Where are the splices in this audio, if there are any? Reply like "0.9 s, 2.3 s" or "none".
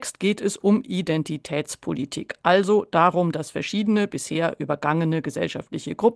none